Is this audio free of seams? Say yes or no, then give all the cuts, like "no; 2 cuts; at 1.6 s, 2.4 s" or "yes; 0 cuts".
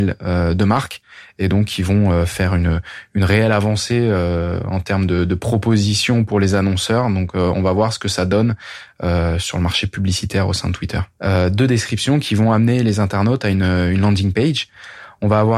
no; 1 cut; at 11.2 s